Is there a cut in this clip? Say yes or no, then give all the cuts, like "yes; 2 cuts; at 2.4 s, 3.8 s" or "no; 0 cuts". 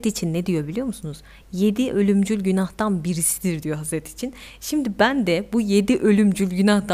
no; 0 cuts